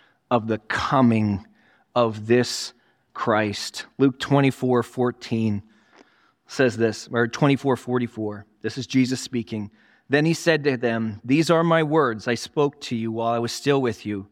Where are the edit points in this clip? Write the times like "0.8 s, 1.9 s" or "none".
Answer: none